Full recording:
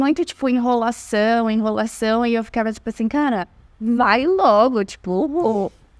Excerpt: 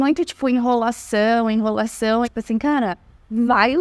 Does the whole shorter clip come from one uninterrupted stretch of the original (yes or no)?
no